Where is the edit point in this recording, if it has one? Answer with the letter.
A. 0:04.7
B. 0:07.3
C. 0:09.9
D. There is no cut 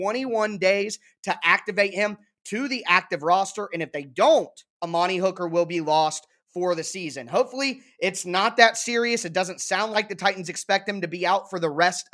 A